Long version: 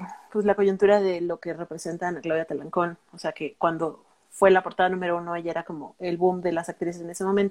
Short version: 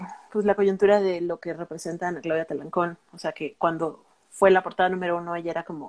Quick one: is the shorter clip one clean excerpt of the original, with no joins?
yes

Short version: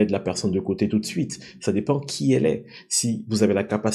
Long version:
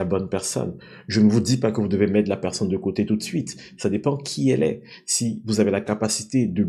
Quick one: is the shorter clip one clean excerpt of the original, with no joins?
yes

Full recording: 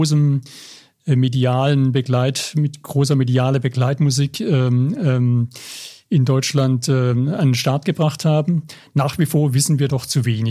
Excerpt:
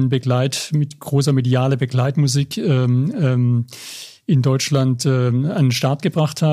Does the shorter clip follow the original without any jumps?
yes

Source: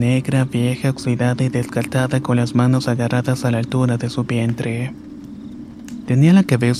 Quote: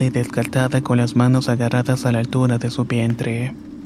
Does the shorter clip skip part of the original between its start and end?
no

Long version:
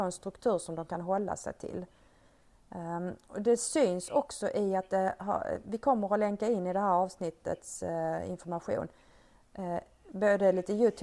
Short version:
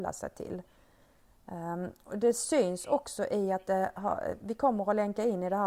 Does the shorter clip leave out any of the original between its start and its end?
no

